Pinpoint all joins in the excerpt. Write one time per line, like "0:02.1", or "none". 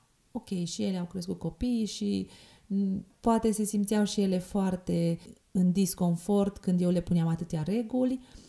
none